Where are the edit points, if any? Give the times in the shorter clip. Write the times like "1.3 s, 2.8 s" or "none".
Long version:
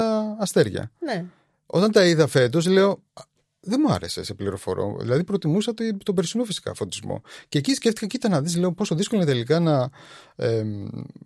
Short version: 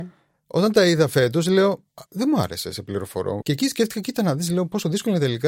2.1 s, 3.4 s